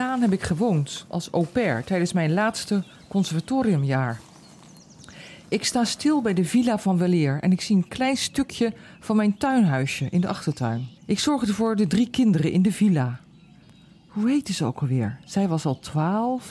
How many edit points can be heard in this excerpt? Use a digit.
1